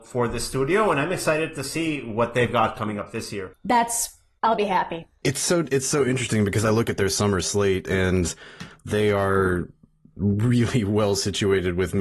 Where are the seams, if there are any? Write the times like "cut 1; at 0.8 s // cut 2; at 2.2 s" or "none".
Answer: cut 1; at 3.5 s

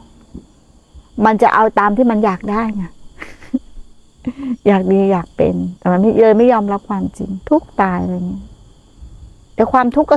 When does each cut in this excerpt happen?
cut 1; at 5.8 s // cut 2; at 7.4 s

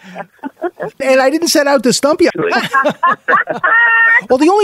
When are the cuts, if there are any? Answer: cut 1; at 1.0 s // cut 2; at 2.3 s

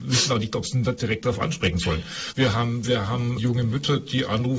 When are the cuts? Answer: cut 1; at 2.3 s // cut 2; at 3.4 s

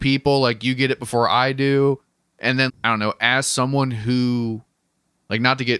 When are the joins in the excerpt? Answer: cut 1; at 2.7 s

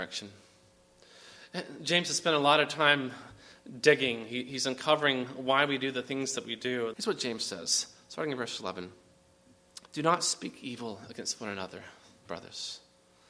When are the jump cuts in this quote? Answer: cut 1; at 6.9 s // cut 2; at 9.9 s

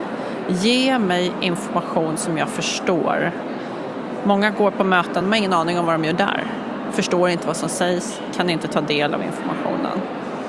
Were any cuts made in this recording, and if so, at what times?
none

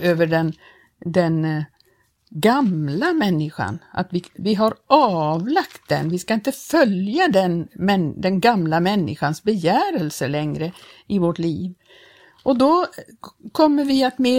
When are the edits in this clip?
none

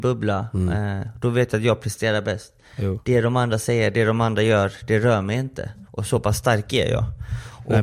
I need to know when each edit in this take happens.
none

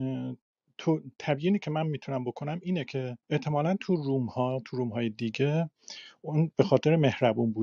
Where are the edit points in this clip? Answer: cut 1; at 3.2 s

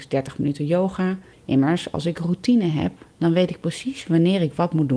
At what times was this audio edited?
cut 1; at 1.3 s

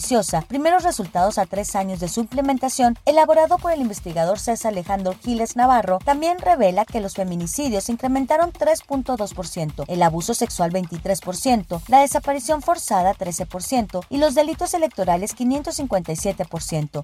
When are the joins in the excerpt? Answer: none

